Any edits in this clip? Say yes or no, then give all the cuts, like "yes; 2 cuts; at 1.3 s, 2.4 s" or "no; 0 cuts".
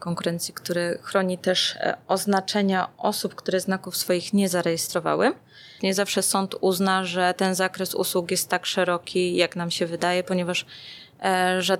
yes; 1 cut; at 5.8 s